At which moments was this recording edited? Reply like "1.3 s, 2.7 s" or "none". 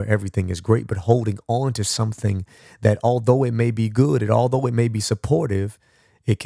none